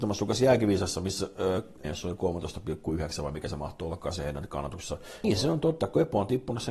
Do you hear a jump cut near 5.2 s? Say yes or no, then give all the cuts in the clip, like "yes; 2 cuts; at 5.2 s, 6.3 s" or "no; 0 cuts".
yes; 2 cuts; at 1.8 s, 5.2 s